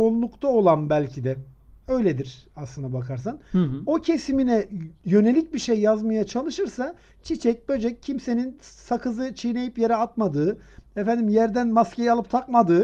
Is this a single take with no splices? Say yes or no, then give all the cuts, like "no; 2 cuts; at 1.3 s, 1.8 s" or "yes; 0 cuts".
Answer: yes; 0 cuts